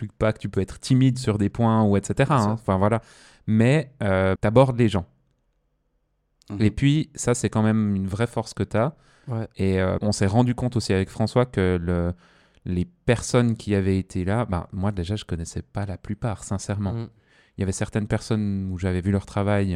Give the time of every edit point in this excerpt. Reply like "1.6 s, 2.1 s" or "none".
4.4 s, 10.0 s